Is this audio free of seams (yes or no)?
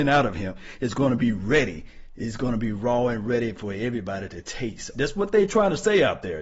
no